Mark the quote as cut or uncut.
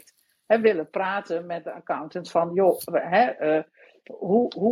uncut